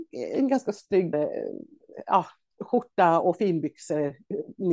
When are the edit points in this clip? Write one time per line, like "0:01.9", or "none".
0:01.1
0:02.6